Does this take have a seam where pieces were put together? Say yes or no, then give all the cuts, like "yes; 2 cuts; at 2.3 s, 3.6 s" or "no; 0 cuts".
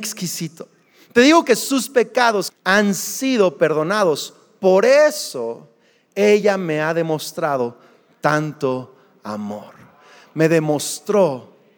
yes; 1 cut; at 2.5 s